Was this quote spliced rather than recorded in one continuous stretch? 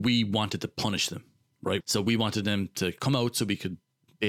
yes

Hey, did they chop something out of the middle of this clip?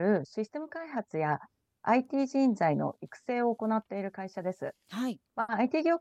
no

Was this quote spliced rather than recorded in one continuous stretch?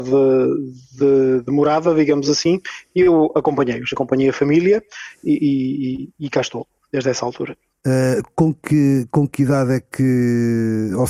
no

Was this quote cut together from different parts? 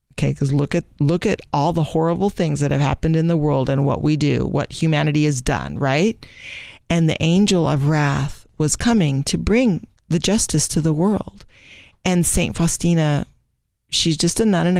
no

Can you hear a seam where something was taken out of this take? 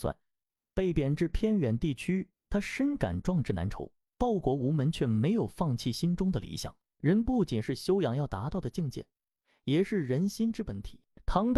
yes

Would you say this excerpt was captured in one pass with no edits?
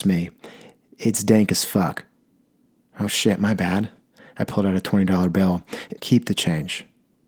no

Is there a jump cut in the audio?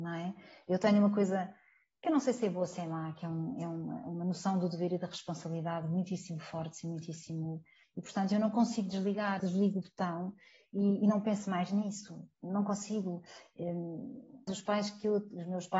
yes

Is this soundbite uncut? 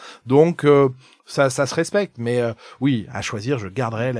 yes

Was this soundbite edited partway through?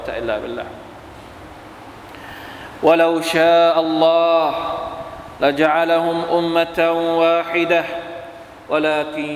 no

